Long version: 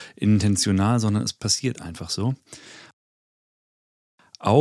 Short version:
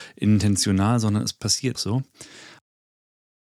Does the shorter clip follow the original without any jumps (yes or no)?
no